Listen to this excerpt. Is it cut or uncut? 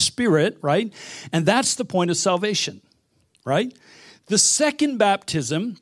uncut